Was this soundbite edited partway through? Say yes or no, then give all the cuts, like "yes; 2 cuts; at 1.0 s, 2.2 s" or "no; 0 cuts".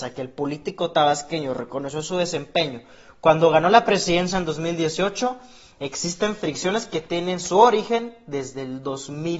no; 0 cuts